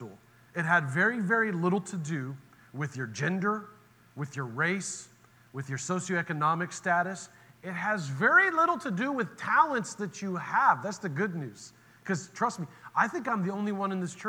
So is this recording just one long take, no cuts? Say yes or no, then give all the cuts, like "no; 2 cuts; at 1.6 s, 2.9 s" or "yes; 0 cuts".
yes; 0 cuts